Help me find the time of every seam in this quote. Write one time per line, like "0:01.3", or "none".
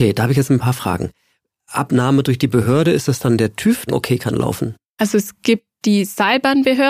0:03.9

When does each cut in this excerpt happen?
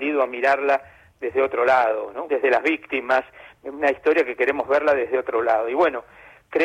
0:02.3

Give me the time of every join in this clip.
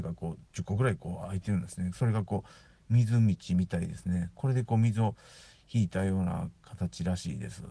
none

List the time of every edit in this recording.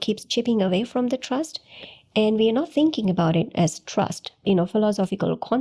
0:04.4

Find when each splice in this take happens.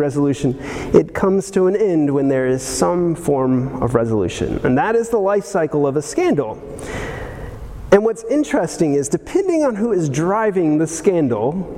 none

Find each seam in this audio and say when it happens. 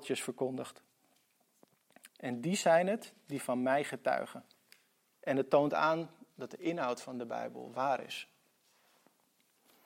0:02.1
0:05.1

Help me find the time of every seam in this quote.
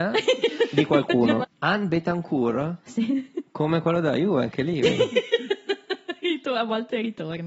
0:01.4

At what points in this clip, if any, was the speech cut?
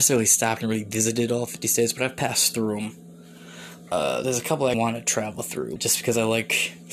0:04.7
0:05.8

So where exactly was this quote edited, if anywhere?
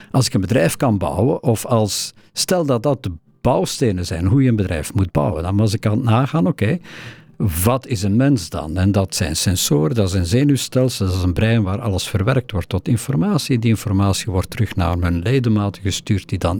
none

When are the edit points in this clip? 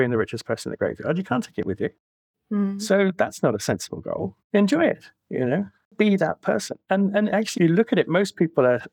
0:05.8
0:07.5

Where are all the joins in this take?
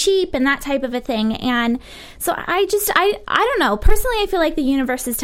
none

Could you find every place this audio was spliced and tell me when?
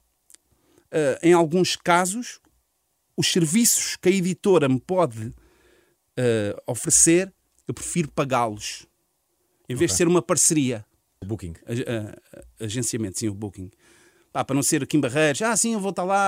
0:11.2

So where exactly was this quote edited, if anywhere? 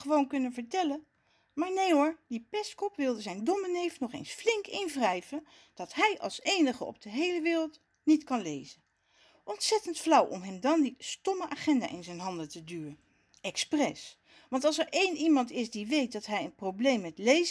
none

